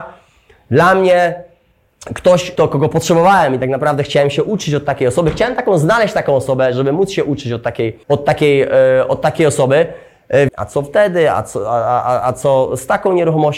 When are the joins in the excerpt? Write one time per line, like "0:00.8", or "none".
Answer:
0:08.0
0:10.5

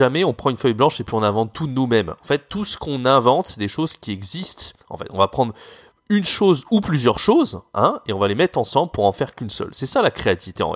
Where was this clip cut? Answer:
none

